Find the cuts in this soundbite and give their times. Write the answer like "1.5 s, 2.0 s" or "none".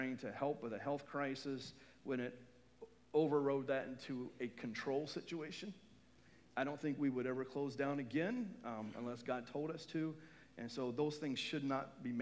none